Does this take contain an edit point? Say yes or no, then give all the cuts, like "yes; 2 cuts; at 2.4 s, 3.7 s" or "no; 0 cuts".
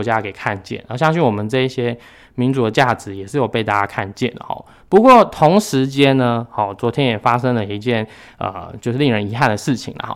no; 0 cuts